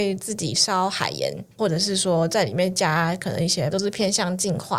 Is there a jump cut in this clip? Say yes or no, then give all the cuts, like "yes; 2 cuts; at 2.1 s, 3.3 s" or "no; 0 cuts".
yes; 2 cuts; at 1.5 s, 3.7 s